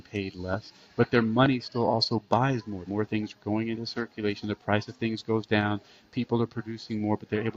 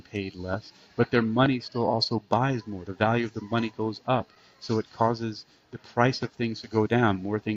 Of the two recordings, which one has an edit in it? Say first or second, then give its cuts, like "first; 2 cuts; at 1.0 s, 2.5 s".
first; 1 cut; at 2.9 s